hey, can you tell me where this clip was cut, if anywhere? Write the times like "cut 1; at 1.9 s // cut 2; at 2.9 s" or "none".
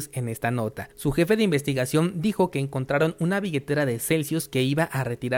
cut 1; at 0.9 s